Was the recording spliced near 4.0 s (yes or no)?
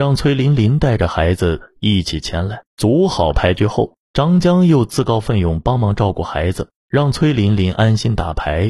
no